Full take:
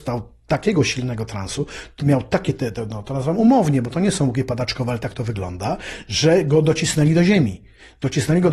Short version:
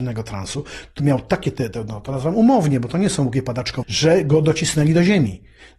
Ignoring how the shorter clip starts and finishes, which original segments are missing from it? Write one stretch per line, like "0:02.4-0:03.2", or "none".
0:04.8-0:06.0